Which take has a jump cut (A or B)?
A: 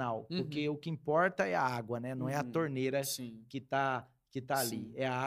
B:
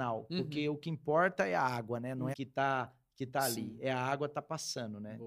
B